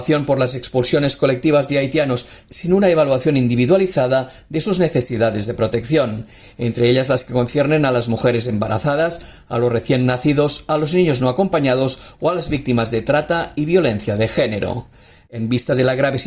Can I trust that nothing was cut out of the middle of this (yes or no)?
yes